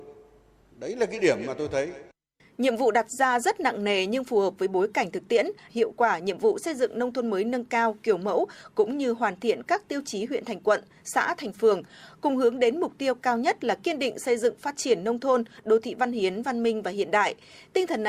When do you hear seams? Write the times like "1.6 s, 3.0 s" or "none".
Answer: 5.7 s